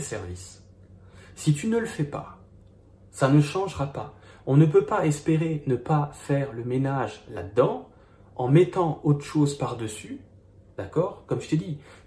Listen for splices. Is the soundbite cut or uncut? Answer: uncut